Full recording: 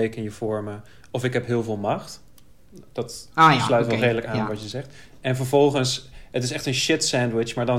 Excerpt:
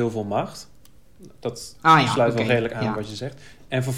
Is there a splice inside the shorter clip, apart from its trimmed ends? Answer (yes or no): no